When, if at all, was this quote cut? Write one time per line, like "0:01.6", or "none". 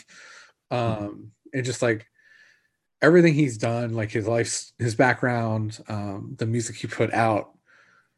none